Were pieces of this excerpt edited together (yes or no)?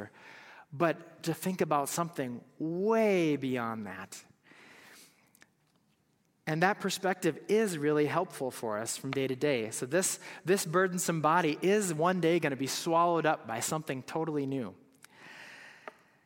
no